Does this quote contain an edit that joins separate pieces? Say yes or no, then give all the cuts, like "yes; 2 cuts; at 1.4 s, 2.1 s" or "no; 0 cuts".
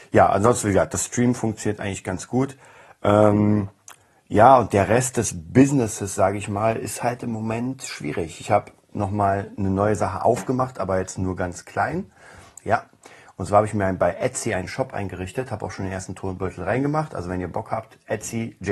yes; 1 cut; at 12.6 s